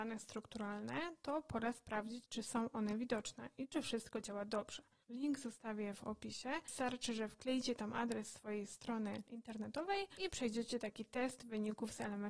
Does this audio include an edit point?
yes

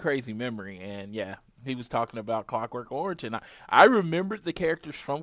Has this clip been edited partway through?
no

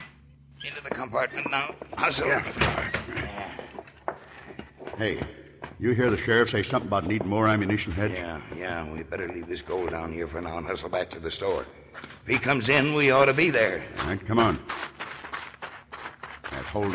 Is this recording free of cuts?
yes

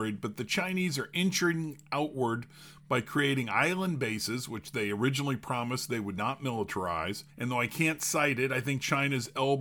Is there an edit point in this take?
yes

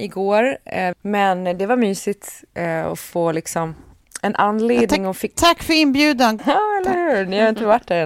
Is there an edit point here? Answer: yes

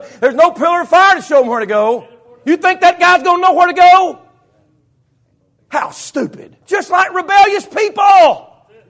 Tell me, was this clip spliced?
yes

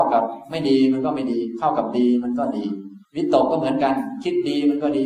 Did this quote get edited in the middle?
yes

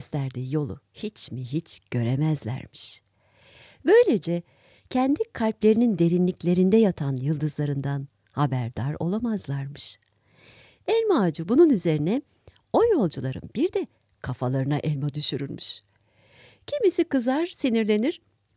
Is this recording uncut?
yes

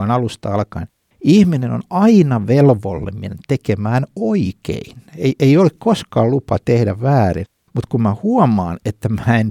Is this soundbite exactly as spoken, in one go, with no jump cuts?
yes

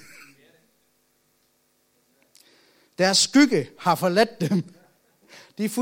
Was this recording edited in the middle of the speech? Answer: no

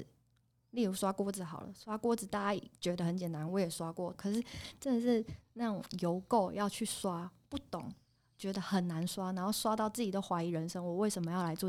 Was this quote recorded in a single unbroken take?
no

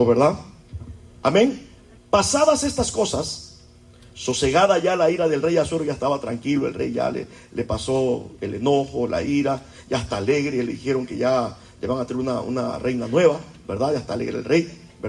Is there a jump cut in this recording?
yes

